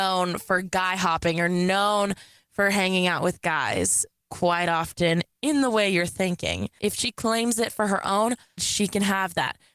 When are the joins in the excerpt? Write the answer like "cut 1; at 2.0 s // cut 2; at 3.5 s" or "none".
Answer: cut 1; at 6.8 s // cut 2; at 8.6 s